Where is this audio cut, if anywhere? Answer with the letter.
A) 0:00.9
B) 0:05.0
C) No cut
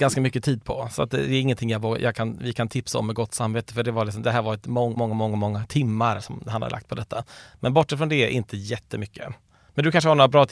B